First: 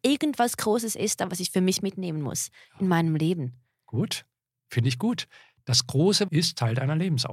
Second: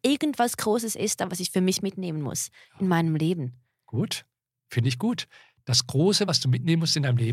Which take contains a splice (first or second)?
first